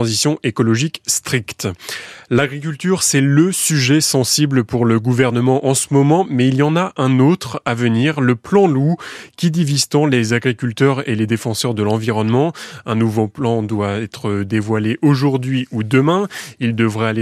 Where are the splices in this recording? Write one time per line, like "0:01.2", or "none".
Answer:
none